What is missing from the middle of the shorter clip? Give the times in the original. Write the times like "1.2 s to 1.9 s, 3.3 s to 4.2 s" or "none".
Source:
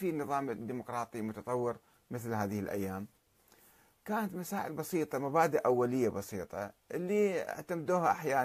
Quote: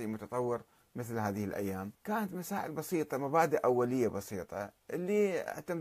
3.1 s to 4.0 s